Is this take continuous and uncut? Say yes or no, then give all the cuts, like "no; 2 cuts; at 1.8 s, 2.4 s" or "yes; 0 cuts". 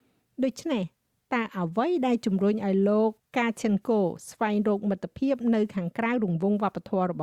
yes; 0 cuts